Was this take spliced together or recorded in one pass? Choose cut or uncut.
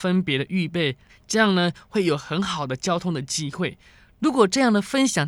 cut